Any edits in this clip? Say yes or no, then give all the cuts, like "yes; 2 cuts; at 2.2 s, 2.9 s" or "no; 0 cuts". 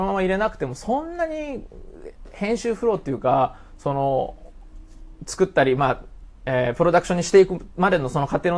no; 0 cuts